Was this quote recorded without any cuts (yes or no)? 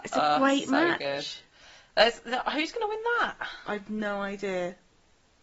yes